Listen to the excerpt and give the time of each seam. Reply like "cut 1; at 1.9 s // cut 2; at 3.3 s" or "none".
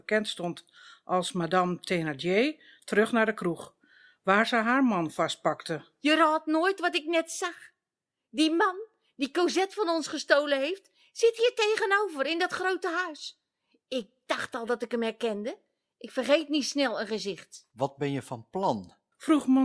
none